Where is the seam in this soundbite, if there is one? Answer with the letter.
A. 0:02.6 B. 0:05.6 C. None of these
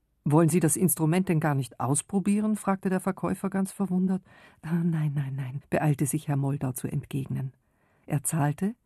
B